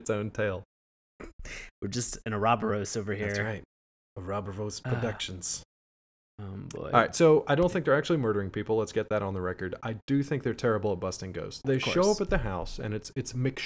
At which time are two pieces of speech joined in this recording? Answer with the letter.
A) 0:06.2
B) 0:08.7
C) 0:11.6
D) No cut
C